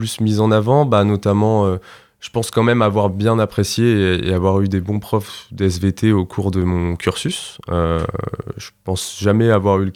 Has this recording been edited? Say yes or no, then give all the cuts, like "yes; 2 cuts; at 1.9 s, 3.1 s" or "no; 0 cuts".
no; 0 cuts